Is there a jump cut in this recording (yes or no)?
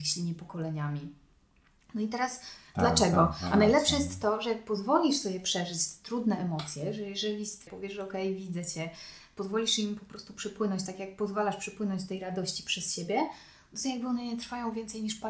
yes